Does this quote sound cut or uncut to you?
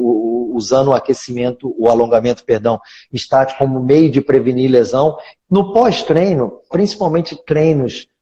cut